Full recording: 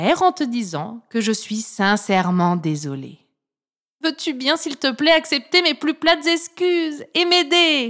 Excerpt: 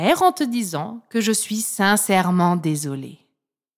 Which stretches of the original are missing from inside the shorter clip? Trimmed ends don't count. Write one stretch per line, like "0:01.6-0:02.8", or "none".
none